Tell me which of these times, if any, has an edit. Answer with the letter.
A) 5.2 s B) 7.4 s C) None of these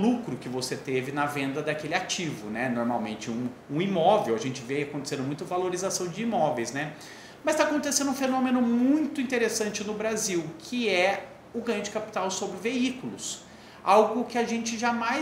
C